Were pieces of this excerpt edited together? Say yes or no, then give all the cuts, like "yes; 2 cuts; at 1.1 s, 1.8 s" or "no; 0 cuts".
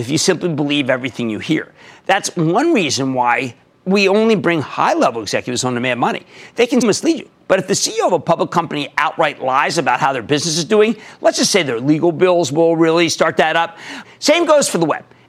yes; 2 cuts; at 6.8 s, 14.0 s